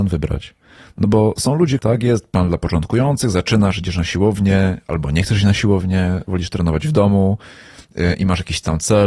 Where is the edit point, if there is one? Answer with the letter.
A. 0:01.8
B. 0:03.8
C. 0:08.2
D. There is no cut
A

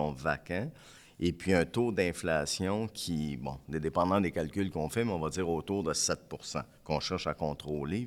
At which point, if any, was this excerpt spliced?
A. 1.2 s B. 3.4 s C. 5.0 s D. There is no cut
D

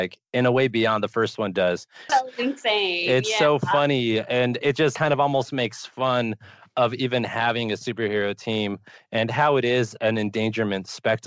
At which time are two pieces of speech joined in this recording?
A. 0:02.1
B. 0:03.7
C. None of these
A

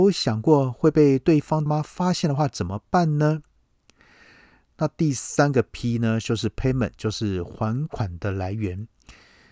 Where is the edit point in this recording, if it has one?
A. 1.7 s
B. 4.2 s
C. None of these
A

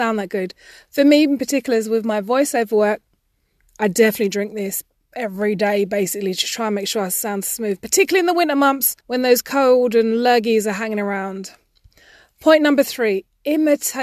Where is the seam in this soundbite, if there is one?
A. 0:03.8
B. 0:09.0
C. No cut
B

